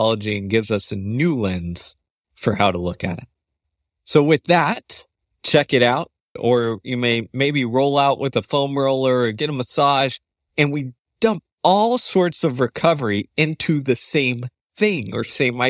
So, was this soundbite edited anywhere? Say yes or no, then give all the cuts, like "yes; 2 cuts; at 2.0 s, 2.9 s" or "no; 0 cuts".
yes; 2 cuts; at 6.4 s, 10.5 s